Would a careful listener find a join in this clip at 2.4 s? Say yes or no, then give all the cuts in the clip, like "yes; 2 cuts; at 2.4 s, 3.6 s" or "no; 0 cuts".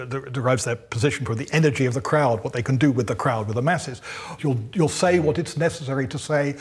no; 1 cut; at 4.4 s